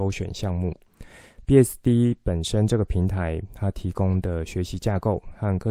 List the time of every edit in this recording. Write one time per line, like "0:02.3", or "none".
0:01.4